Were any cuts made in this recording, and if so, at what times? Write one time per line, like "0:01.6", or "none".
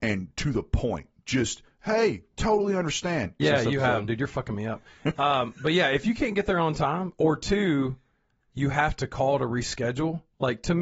0:03.4